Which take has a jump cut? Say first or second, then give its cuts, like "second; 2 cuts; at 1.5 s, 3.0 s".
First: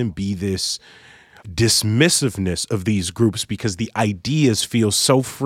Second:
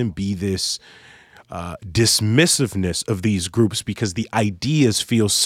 first; 1 cut; at 1.4 s